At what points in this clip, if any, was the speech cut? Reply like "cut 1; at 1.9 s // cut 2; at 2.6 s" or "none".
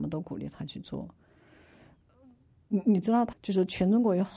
cut 1; at 3.3 s